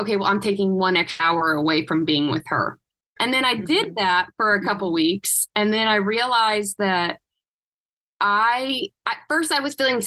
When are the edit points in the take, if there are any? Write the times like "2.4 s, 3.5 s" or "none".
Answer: 3.2 s